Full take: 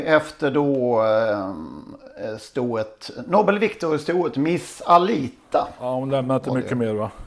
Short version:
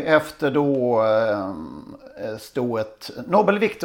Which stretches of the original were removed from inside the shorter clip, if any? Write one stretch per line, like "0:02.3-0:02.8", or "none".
none